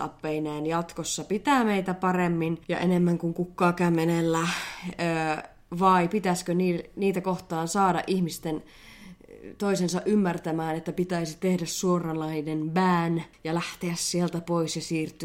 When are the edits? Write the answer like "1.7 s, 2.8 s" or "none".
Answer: 2.6 s, 13.3 s